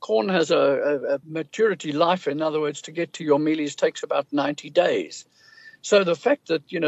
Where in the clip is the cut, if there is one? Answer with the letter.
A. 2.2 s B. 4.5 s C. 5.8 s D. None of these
D